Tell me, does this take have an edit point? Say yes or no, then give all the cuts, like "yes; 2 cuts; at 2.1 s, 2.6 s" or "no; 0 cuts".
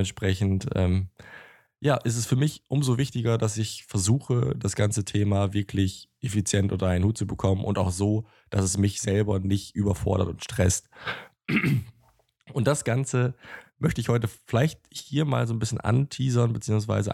no; 0 cuts